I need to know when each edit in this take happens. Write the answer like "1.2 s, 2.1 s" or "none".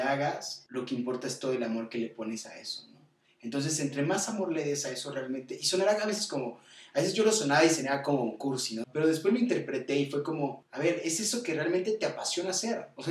8.8 s